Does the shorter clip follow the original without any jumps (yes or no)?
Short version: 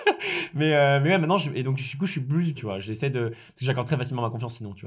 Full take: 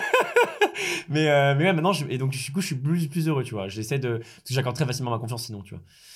no